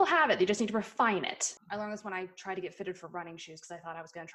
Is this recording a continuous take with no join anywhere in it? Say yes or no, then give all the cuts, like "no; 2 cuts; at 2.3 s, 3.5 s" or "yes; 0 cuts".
no; 1 cut; at 1.6 s